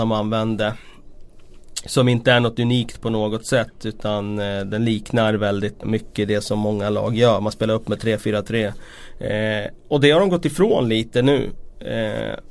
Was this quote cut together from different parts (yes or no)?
yes